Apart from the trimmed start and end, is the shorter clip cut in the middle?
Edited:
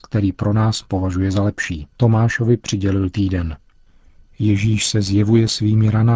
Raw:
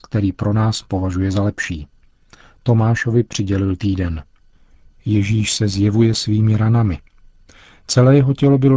yes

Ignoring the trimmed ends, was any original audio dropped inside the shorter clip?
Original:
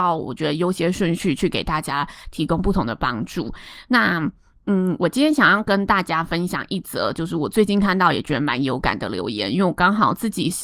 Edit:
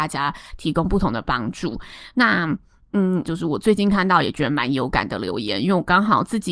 yes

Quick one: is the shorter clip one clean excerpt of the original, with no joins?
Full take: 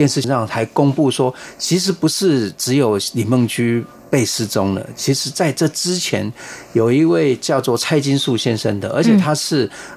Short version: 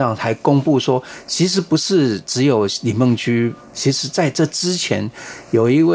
no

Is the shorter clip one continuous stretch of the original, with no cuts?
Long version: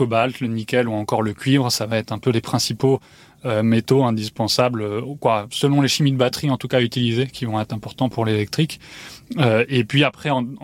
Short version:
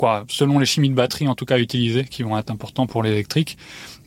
yes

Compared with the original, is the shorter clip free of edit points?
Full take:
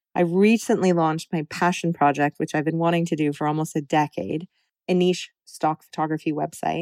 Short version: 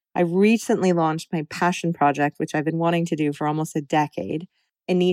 yes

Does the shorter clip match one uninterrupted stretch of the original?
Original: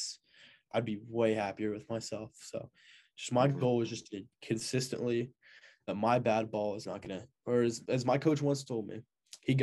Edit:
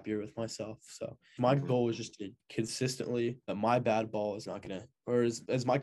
no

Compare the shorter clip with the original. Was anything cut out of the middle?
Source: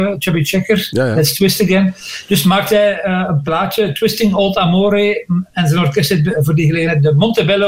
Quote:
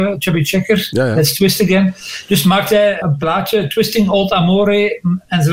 yes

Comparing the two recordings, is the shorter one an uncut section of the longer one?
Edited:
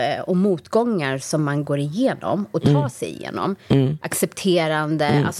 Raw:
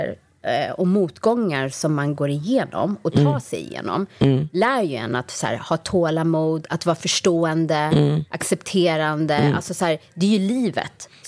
no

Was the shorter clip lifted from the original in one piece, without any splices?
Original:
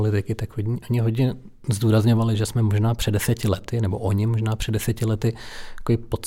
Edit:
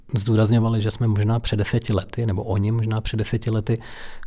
yes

